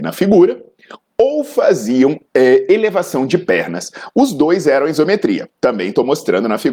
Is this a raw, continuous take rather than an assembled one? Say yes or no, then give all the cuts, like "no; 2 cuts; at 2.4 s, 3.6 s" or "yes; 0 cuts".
no; 1 cut; at 2.3 s